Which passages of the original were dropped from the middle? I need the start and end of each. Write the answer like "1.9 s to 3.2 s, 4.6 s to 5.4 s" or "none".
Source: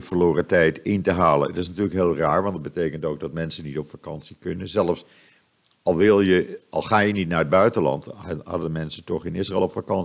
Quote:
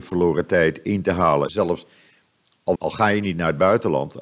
1.5 s to 4.7 s, 5.9 s to 6.7 s